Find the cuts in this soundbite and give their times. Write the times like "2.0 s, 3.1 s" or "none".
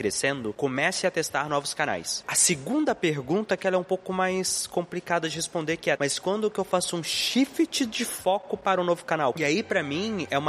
6.0 s, 9.3 s